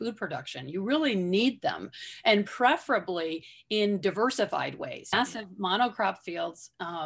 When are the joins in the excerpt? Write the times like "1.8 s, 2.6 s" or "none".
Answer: 5.1 s